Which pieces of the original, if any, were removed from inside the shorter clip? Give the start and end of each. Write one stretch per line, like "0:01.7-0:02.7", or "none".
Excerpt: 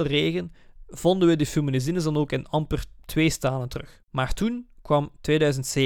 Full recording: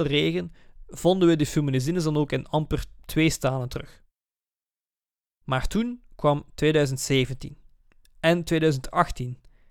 0:04.0-0:05.4